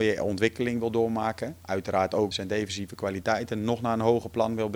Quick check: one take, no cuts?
no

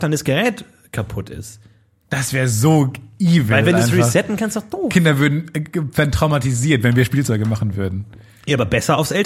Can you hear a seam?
no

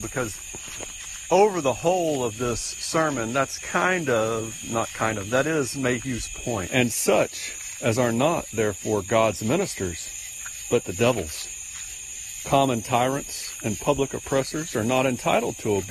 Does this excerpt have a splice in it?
yes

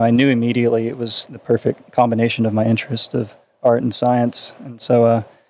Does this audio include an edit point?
yes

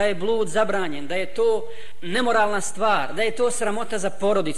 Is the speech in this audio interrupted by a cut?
no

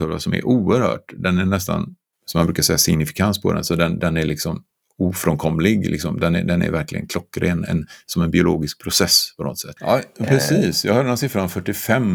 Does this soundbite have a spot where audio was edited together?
yes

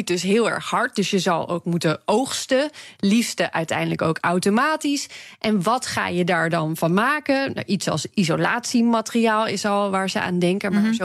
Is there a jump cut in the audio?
no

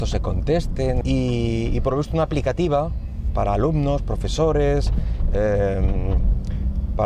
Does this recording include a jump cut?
yes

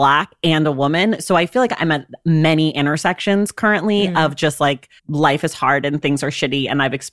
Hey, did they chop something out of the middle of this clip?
yes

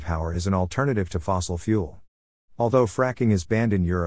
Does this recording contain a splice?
no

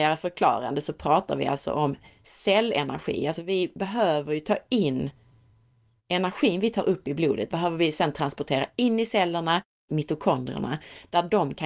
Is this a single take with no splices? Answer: no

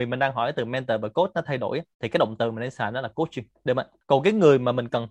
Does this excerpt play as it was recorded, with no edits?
no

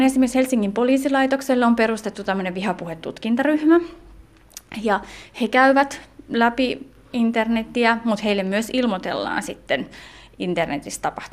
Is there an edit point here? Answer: no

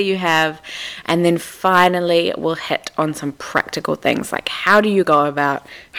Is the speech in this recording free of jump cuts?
yes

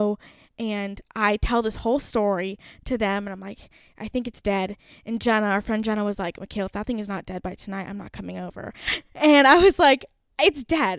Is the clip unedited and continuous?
yes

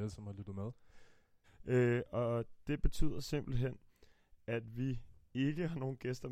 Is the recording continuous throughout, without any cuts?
no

